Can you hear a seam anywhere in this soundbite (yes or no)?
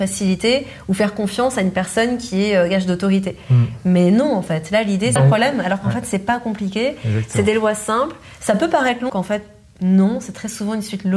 yes